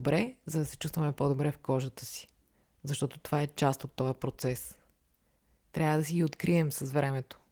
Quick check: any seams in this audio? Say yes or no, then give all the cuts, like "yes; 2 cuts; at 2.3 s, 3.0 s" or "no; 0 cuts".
no; 0 cuts